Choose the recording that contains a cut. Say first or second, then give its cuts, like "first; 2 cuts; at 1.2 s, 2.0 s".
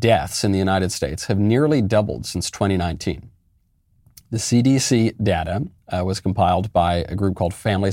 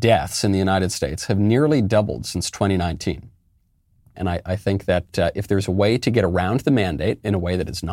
second; 1 cut; at 4.1 s